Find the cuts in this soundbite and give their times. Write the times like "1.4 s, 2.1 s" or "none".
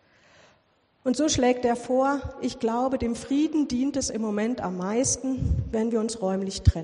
none